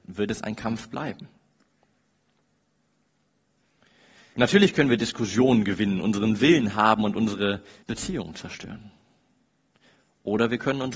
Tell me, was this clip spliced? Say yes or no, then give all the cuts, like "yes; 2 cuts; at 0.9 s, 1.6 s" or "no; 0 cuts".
yes; 2 cuts; at 4.3 s, 7.8 s